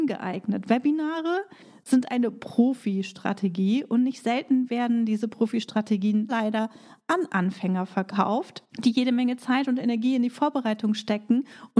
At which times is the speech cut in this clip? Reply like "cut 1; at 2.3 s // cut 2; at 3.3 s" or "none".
cut 1; at 6.3 s // cut 2; at 8.7 s